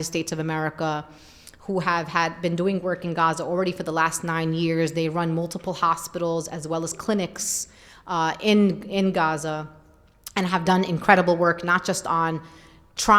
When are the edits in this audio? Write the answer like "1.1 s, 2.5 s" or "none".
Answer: none